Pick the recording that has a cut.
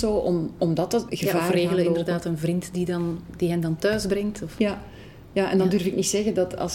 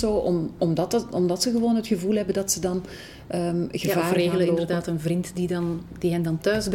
first; 1 cut; at 1.1 s

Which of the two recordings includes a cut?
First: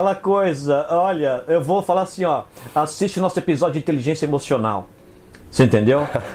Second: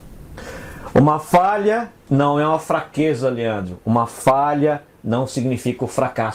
second; 1 cut; at 2.0 s

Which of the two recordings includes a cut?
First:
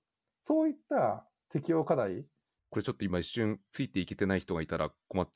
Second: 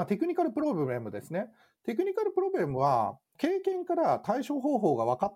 first; 1 cut; at 2.6 s

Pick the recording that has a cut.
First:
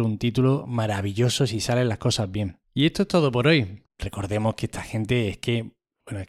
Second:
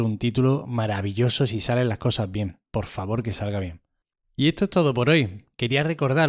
first; 2 cuts; at 2.6 s, 3.9 s

